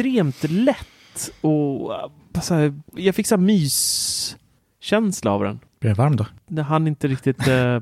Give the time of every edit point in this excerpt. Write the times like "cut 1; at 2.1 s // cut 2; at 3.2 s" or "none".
cut 1; at 3.0 s